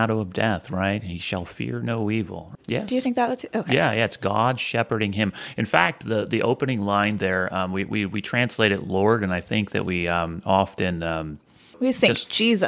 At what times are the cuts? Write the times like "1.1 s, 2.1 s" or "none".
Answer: 2.6 s